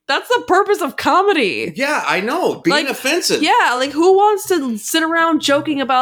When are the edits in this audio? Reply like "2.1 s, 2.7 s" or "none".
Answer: none